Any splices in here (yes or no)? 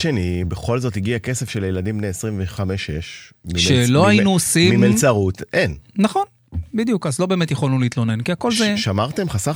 no